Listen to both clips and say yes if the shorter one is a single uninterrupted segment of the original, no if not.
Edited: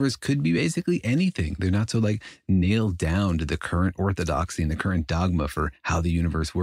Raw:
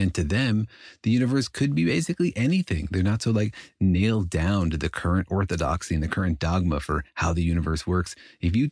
yes